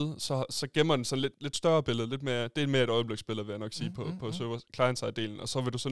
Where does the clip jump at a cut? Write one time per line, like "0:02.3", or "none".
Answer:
0:01.3